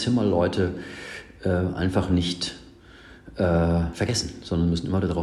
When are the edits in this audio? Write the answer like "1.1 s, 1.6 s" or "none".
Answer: none